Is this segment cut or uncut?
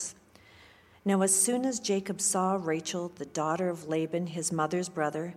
uncut